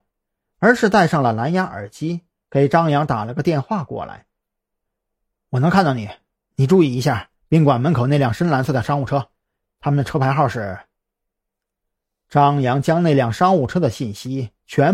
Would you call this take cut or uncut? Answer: uncut